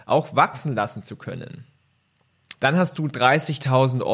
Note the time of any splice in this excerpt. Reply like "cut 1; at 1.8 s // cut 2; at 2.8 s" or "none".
cut 1; at 2.5 s